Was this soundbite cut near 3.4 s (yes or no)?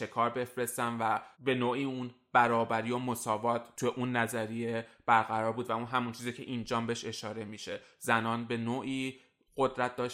no